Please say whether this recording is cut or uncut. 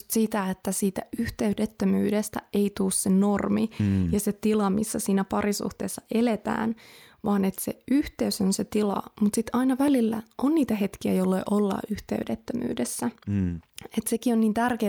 uncut